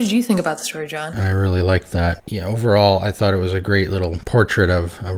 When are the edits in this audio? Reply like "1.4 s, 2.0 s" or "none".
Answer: 1.1 s